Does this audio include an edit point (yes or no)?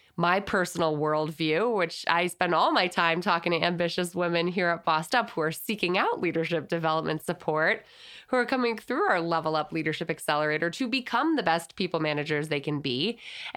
no